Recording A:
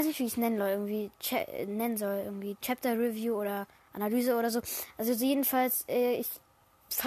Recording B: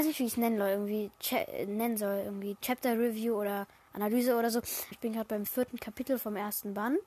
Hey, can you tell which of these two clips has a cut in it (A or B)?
B